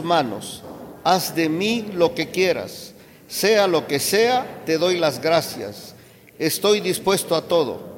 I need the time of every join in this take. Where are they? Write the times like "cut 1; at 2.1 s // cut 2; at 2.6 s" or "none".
none